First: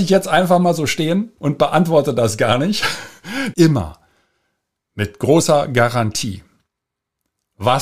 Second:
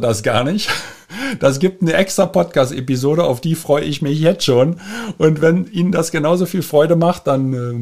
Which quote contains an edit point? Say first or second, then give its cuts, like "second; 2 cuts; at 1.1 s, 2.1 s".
first; 1 cut; at 3.5 s